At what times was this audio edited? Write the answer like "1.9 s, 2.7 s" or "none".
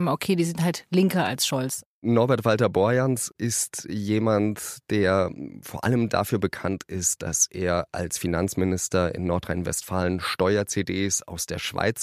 1.9 s

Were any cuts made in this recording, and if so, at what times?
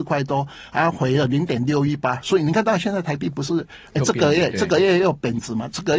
none

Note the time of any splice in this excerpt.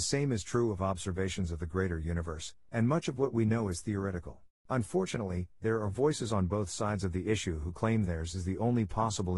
2.7 s, 4.7 s

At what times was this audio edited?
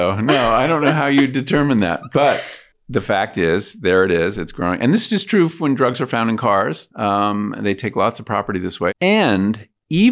6.9 s, 8.9 s

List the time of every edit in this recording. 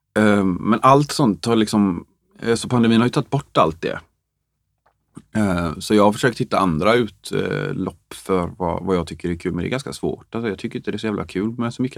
none

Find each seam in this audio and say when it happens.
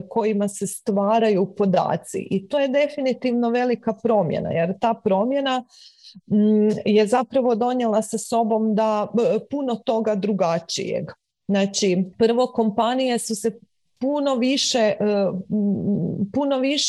12.1 s

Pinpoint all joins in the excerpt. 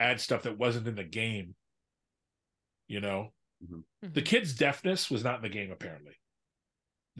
none

